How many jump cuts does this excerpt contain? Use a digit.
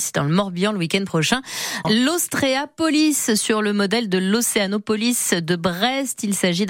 1